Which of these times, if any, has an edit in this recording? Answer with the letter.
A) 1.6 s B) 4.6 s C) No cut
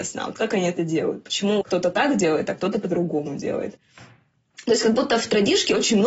A